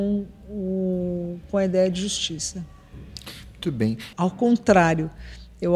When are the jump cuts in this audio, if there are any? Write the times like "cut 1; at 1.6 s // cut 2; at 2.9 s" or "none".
cut 1; at 4.1 s